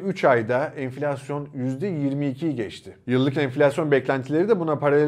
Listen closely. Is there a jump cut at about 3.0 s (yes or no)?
no